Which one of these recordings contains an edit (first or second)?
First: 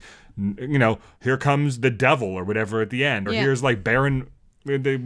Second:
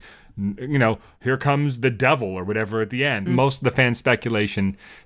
second